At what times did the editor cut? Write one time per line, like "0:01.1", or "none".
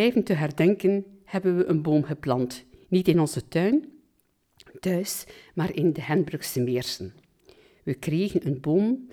none